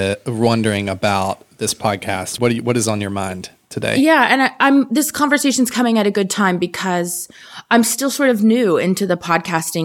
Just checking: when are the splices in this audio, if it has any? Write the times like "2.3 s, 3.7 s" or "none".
none